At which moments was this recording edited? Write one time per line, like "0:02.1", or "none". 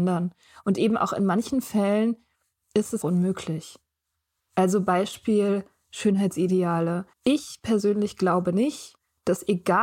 0:03.0
0:07.1